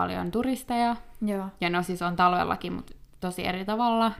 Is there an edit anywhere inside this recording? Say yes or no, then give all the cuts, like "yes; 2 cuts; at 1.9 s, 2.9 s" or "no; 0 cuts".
no; 0 cuts